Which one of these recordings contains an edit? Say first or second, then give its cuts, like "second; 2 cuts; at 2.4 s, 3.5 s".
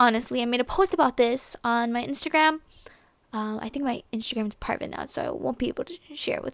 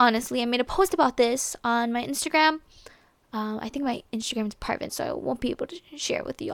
second; 1 cut; at 4.9 s